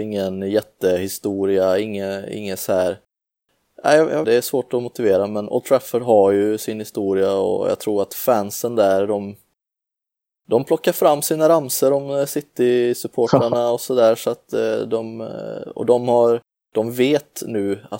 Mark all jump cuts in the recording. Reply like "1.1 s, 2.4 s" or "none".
4.2 s